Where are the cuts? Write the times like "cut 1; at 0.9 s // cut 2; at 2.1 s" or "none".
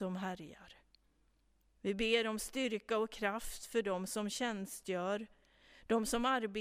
cut 1; at 1.7 s